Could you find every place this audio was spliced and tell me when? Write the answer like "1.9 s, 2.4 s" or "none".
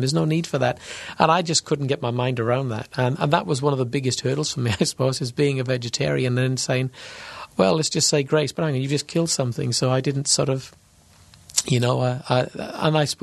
none